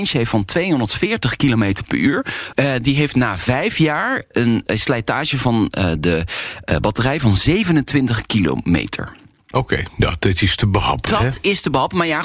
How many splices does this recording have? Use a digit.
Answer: 1